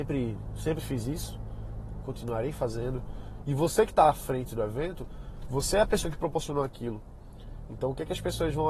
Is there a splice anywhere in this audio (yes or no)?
yes